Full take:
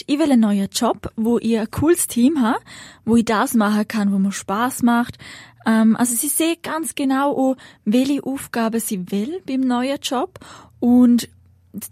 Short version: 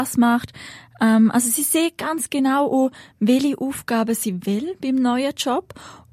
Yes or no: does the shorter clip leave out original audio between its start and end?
no